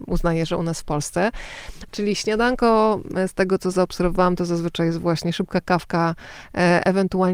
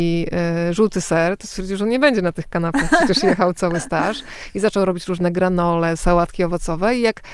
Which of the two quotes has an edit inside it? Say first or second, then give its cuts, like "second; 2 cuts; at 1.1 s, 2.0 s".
first; 1 cut; at 1.9 s